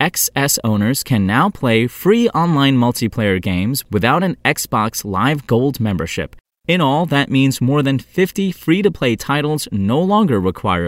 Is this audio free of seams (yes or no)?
yes